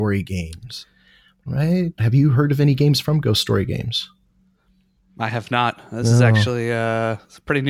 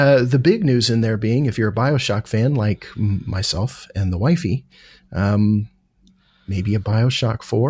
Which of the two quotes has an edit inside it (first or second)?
first